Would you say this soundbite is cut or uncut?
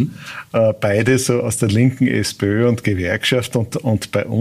uncut